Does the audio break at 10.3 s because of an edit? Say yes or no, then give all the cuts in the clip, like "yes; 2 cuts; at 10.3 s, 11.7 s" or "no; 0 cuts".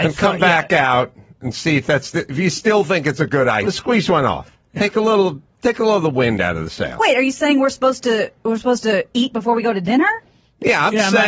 no; 1 cut; at 3.6 s